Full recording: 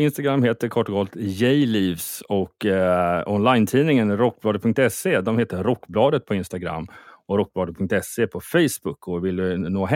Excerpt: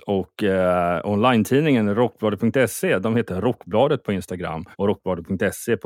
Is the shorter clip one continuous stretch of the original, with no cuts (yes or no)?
no